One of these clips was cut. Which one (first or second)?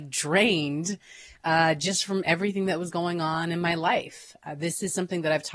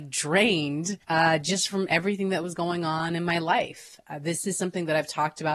second